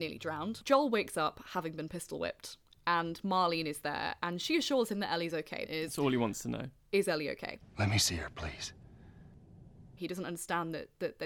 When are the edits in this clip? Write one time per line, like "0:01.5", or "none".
0:05.7
0:10.0